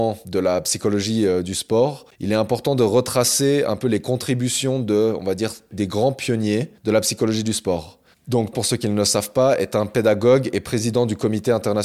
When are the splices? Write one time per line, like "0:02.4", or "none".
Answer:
0:08.5

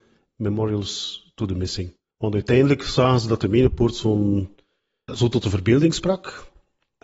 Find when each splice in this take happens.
0:02.1
0:05.1

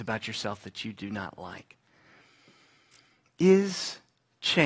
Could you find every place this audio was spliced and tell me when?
none

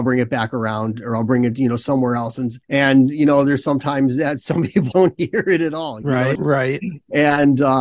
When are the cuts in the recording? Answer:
0:02.6
0:04.9
0:06.4

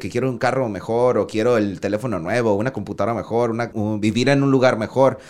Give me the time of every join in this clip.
0:03.7

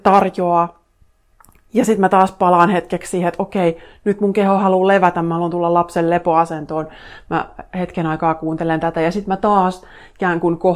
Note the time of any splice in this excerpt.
none

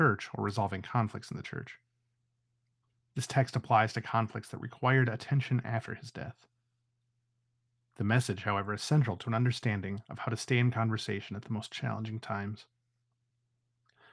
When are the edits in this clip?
none

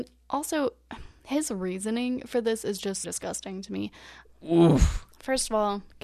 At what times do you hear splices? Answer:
0:03.0
0:04.2

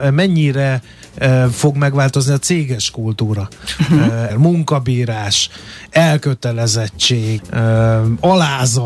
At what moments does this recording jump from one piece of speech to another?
0:04.3
0:07.4

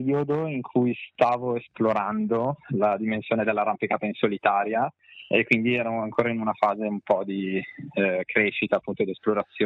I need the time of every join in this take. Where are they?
none

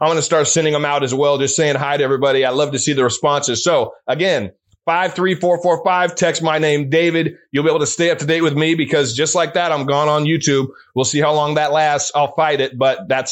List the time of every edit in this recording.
none

